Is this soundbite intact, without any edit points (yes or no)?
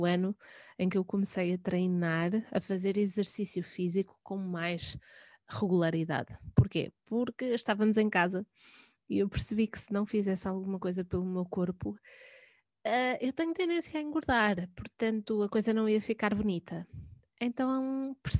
yes